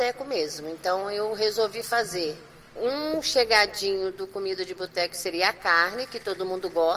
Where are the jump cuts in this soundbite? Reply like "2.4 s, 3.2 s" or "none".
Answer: none